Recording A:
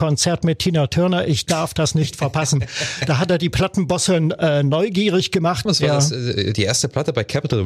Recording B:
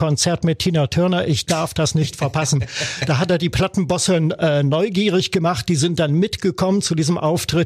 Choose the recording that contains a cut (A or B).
A